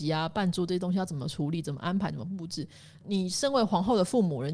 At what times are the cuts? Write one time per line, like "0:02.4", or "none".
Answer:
none